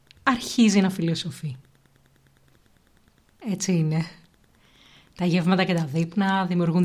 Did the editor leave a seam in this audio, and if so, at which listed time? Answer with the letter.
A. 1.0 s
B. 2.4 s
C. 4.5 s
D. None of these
D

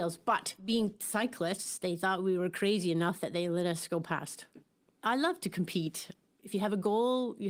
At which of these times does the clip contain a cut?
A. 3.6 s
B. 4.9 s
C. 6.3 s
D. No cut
B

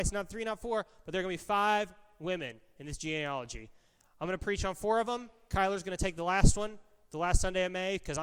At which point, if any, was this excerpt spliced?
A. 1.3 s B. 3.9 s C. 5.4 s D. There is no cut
D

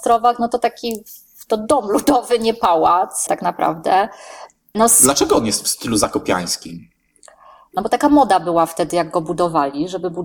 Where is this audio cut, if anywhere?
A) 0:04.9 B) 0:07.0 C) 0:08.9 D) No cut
D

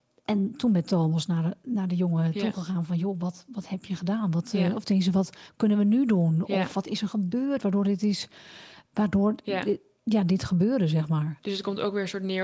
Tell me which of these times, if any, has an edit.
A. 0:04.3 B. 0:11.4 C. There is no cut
C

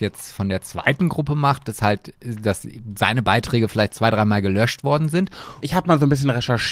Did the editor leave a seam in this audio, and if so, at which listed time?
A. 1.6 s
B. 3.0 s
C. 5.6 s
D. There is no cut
C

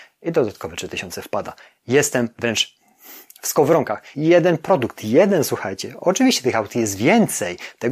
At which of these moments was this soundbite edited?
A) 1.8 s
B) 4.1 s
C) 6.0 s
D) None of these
B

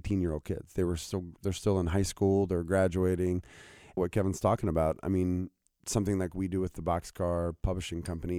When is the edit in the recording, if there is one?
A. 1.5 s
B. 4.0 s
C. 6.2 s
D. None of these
B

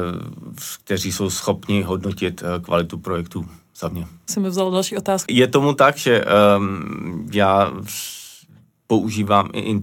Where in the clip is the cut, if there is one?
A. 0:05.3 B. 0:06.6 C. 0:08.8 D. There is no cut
A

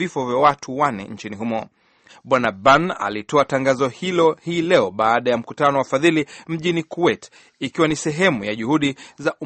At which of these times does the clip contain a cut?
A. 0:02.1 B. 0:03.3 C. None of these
A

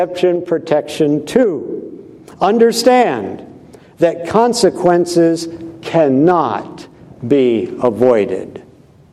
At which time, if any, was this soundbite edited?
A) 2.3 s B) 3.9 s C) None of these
C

